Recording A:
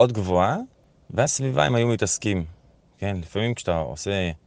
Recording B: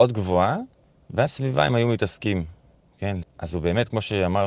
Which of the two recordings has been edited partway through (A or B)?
B